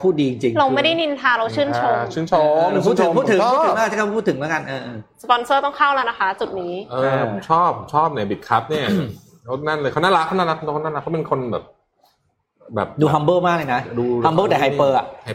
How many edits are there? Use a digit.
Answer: 0